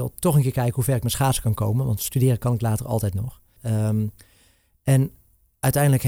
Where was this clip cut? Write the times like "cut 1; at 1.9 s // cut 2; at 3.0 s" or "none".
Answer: cut 1; at 3.6 s